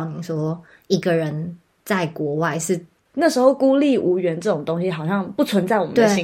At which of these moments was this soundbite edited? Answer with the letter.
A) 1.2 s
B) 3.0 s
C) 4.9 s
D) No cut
B